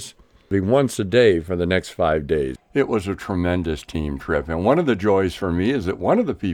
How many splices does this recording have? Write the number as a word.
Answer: one